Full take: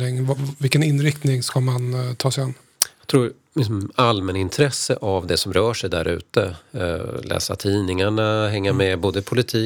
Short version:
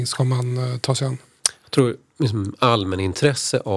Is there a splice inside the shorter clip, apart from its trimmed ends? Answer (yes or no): no